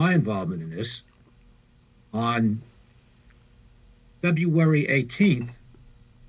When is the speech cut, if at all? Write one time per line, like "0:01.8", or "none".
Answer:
none